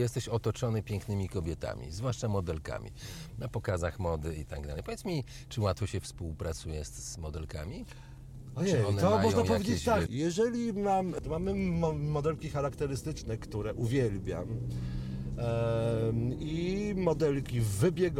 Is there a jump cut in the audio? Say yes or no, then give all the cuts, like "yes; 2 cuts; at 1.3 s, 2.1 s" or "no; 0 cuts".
yes; 2 cuts; at 10.1 s, 11.2 s